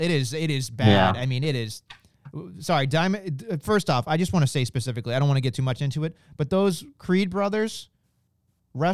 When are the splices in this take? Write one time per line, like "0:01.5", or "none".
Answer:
none